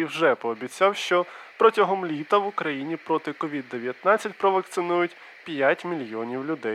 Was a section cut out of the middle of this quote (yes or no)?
no